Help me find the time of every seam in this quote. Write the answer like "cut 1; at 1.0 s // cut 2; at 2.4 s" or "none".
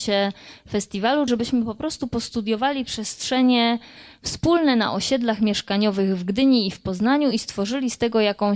cut 1; at 1.3 s